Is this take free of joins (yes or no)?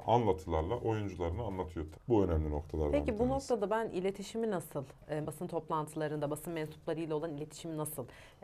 no